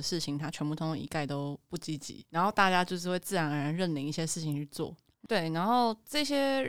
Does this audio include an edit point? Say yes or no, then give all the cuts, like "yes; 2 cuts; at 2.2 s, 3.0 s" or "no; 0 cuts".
yes; 1 cut; at 5.2 s